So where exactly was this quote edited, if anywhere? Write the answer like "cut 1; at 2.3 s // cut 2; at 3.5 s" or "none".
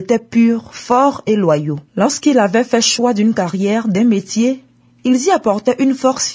cut 1; at 1.9 s